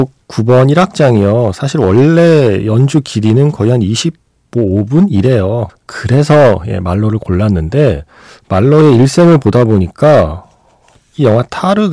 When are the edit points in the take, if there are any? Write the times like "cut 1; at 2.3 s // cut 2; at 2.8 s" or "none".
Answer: cut 1; at 5.7 s

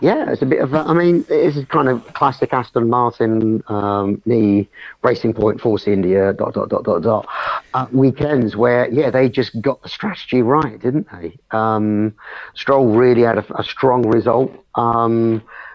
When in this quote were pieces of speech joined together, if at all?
none

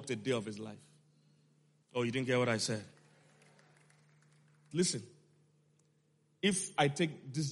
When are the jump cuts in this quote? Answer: cut 1; at 1.8 s // cut 2; at 4.7 s

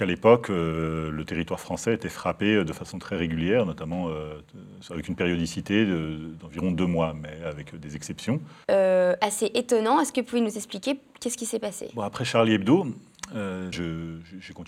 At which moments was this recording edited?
cut 1; at 8.6 s // cut 2; at 13.7 s

